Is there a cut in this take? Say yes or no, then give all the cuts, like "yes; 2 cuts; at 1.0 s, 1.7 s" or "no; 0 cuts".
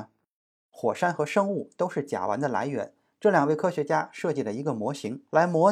no; 0 cuts